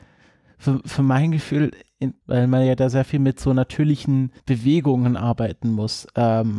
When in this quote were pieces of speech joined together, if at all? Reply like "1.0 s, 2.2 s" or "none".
2.2 s, 4.4 s